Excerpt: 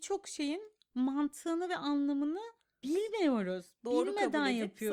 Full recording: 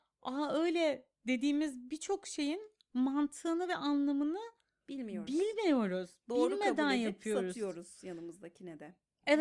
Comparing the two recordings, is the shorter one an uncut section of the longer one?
no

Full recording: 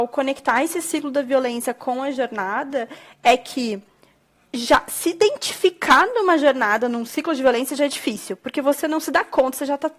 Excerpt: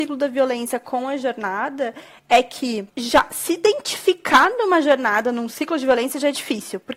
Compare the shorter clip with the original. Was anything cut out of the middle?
yes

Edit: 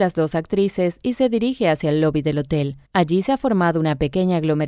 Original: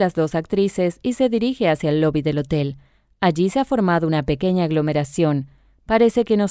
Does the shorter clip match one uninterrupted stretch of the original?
no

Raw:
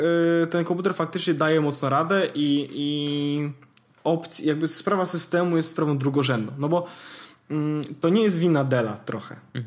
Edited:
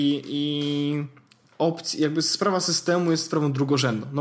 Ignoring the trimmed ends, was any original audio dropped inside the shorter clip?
no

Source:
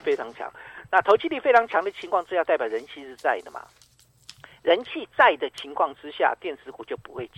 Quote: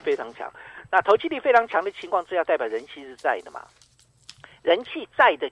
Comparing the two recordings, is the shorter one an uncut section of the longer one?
yes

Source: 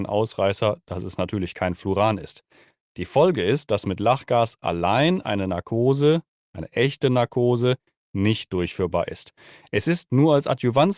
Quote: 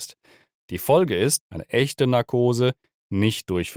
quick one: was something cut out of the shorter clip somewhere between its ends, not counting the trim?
yes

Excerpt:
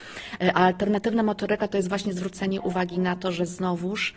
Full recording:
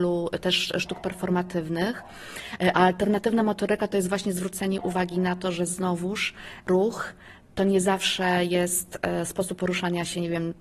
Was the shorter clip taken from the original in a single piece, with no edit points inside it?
yes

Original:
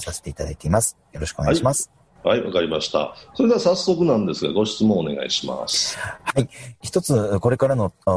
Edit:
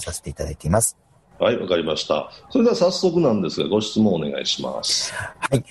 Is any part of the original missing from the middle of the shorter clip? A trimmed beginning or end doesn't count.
yes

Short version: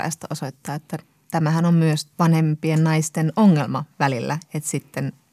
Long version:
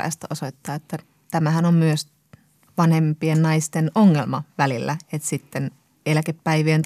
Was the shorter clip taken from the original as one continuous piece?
no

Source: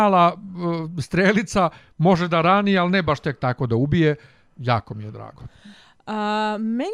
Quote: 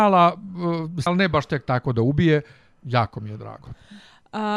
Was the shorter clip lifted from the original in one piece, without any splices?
no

